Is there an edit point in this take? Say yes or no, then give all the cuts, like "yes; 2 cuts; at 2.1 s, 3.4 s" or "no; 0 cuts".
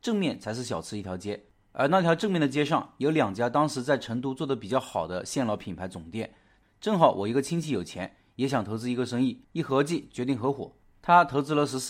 yes; 2 cuts; at 6.6 s, 9.4 s